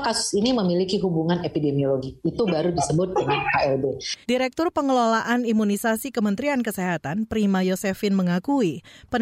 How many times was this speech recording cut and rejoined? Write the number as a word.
one